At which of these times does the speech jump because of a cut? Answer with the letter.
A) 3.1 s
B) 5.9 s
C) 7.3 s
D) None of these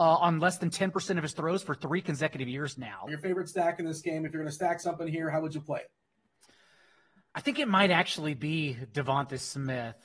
A